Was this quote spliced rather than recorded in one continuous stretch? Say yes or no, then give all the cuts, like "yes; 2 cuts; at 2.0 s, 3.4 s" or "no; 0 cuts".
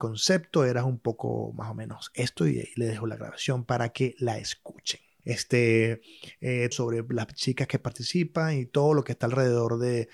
yes; 2 cuts; at 5.2 s, 6.7 s